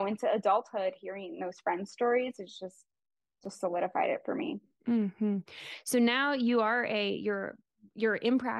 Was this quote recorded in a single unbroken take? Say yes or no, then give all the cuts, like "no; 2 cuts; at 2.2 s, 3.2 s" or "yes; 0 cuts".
yes; 0 cuts